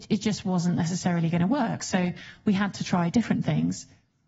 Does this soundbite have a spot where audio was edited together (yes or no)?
no